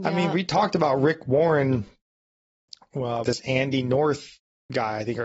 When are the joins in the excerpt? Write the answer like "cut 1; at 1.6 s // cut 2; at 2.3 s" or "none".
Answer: cut 1; at 3.2 s